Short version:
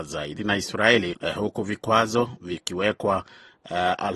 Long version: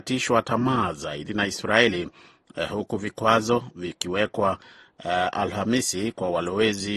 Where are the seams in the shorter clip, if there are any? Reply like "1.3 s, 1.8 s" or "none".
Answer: 1.1 s

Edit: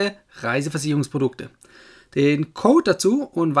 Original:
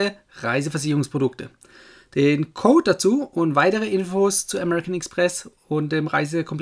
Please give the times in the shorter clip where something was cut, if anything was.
none

